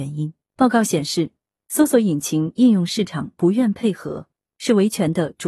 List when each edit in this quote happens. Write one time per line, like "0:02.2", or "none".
none